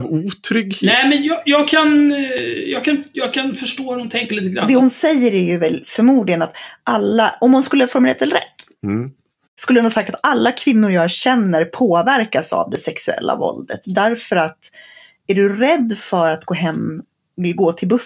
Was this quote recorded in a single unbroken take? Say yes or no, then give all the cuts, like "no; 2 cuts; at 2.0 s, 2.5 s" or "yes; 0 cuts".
yes; 0 cuts